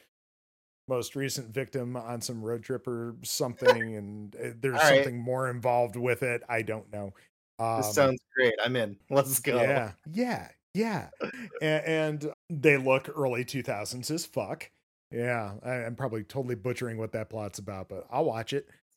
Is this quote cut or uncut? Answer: cut